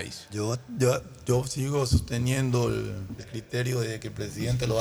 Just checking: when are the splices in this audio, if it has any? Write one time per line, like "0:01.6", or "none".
0:03.2